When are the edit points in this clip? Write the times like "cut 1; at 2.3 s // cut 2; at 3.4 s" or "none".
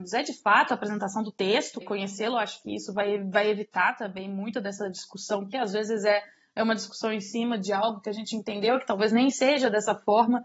cut 1; at 1.8 s